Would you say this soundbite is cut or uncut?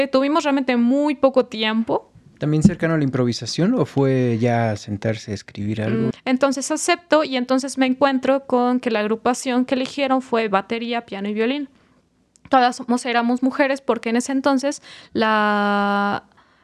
cut